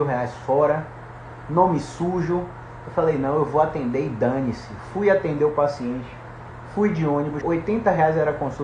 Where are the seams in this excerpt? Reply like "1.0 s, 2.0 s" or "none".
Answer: 7.4 s

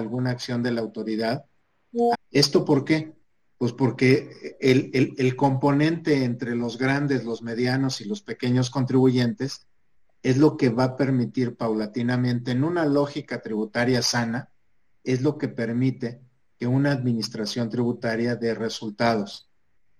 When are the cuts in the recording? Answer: 2.1 s

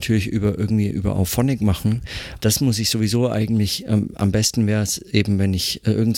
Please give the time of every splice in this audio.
2.4 s

